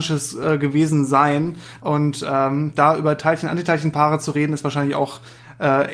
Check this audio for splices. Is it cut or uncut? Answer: cut